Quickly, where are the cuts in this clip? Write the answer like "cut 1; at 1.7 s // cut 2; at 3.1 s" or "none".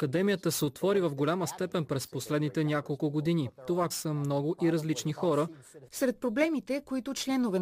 cut 1; at 3.9 s // cut 2; at 5.9 s